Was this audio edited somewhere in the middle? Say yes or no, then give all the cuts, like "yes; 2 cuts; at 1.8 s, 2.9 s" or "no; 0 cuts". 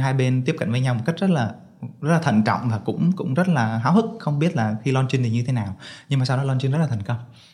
no; 0 cuts